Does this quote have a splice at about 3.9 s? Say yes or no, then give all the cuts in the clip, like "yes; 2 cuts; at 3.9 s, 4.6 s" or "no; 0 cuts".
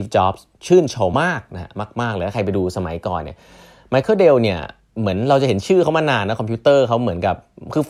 no; 1 cut; at 1.1 s